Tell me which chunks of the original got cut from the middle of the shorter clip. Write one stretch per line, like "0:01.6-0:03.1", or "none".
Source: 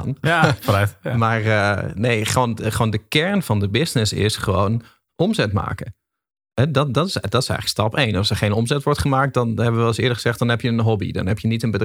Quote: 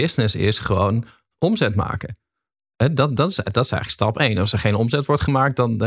none